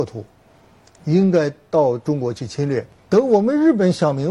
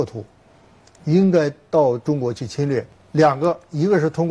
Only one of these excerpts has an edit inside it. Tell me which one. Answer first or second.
first